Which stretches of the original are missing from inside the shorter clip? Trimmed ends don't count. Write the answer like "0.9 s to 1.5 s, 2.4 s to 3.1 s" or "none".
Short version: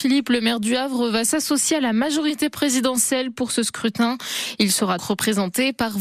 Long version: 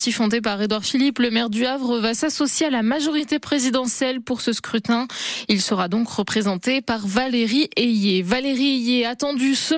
5.9 s to 6.1 s